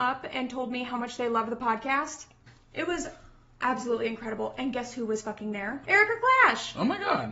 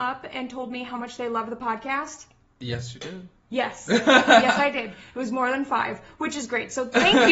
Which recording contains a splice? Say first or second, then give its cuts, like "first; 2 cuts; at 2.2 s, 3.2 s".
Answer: first; 2 cuts; at 2.5 s, 5.8 s